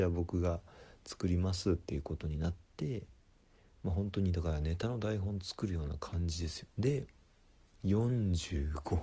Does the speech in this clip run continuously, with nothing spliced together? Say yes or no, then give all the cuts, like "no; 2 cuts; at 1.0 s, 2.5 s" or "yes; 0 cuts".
no; 1 cut; at 6.7 s